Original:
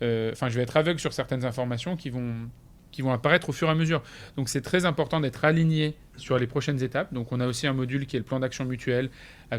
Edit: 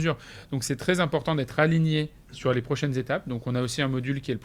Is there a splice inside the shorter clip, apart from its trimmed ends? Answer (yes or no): no